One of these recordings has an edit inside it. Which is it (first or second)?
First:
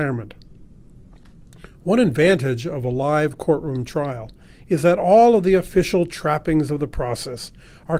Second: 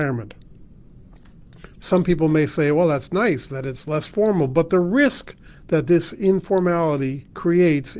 second